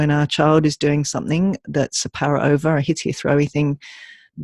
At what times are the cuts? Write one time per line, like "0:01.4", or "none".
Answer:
0:03.0